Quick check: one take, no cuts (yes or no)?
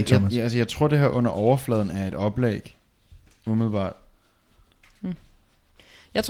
yes